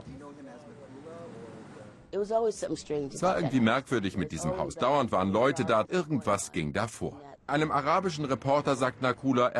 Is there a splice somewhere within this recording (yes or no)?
yes